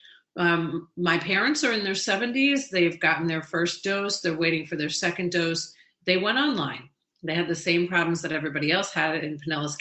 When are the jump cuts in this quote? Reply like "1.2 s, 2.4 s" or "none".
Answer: none